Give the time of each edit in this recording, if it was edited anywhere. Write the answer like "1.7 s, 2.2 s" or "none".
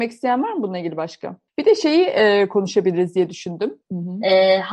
1.5 s, 3.8 s